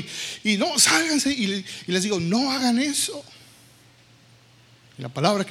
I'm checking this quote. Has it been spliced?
no; 0 cuts

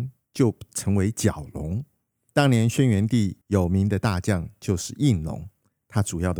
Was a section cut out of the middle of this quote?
yes; 2 cuts; at 2.3 s, 3.4 s

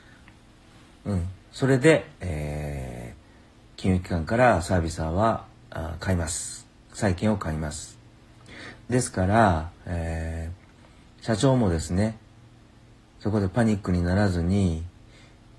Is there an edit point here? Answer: no; 0 cuts

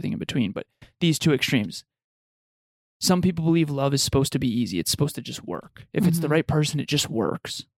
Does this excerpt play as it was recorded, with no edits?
yes; 0 cuts

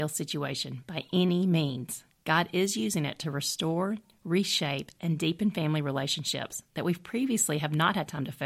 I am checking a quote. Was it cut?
no; 0 cuts

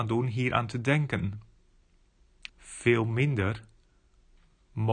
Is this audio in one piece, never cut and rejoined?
no; 1 cut; at 2.5 s

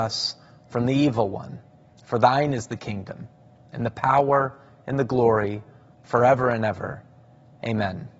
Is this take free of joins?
yes; 0 cuts

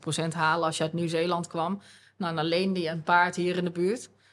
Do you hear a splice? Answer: no; 0 cuts

